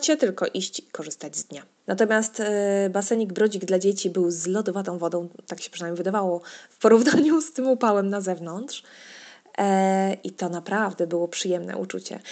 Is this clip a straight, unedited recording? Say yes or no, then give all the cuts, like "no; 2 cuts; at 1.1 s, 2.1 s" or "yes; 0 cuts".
no; 1 cut; at 1.8 s